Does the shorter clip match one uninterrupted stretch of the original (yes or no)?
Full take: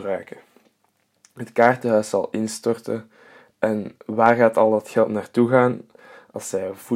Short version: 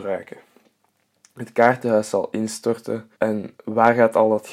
no